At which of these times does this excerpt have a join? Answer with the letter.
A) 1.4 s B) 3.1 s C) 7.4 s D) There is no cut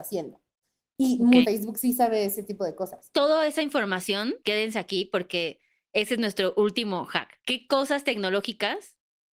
A